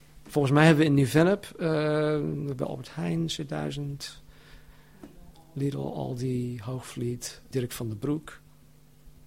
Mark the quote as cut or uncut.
cut